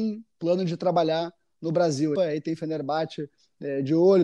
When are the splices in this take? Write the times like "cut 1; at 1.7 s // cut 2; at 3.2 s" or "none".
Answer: cut 1; at 2.2 s